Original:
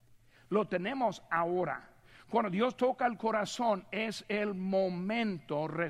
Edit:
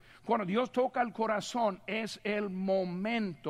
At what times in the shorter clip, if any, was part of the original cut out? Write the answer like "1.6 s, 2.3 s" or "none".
none